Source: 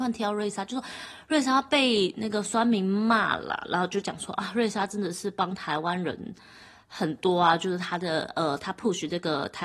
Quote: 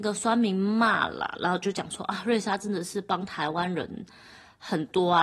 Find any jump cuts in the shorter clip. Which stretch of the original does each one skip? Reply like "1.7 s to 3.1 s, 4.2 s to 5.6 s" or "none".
none